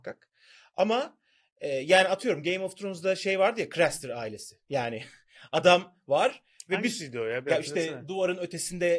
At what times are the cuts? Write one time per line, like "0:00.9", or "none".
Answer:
none